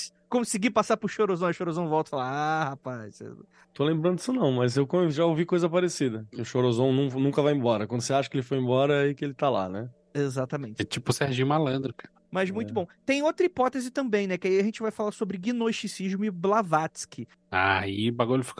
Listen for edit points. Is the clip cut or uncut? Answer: uncut